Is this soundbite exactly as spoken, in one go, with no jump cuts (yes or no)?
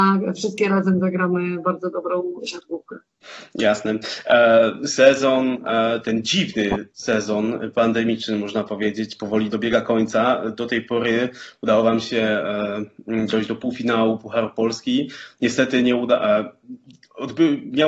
yes